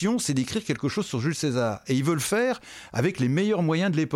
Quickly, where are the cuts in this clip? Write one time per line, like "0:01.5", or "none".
none